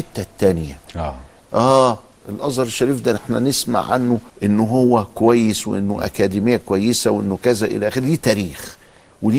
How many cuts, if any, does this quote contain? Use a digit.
2